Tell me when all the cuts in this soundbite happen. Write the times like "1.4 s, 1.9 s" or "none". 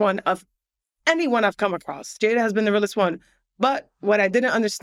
none